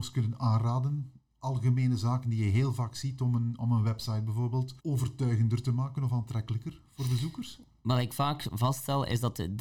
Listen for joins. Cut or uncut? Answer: cut